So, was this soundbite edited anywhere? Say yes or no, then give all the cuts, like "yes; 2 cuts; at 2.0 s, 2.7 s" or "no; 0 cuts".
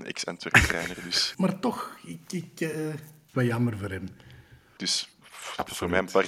yes; 3 cuts; at 1.3 s, 3.3 s, 4.8 s